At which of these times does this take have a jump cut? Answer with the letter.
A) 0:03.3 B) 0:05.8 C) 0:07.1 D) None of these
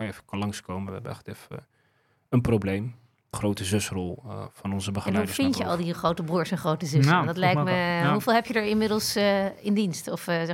A